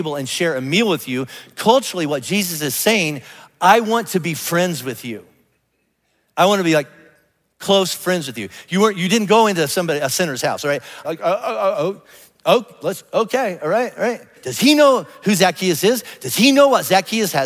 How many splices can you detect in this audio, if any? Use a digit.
2